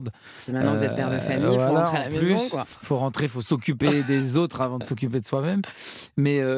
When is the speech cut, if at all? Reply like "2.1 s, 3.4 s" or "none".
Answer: none